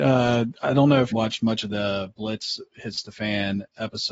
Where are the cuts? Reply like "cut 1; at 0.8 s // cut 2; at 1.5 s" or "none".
cut 1; at 1.1 s